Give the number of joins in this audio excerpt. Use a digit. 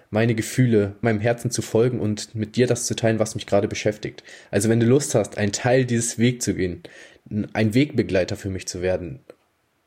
1